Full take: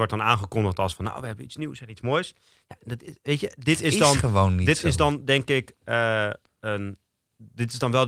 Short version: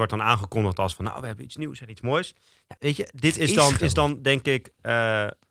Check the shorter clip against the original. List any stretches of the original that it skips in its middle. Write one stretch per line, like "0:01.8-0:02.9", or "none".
0:02.8-0:03.2
0:04.2-0:04.8